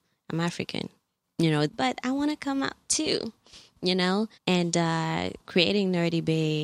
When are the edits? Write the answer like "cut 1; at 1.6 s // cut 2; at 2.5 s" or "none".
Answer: cut 1; at 1.7 s // cut 2; at 4.4 s // cut 3; at 5.4 s